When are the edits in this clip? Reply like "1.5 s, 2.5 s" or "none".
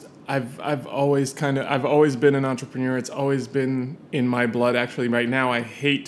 none